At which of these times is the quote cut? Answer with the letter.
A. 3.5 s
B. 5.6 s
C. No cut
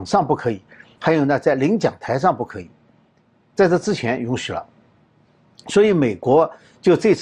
C